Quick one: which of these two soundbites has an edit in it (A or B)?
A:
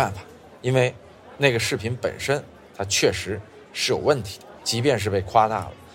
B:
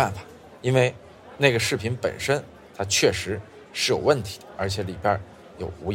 A